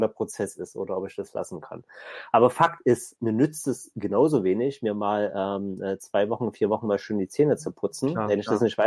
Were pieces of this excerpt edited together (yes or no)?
yes